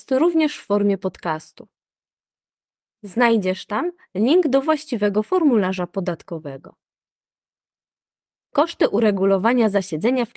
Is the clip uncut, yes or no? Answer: yes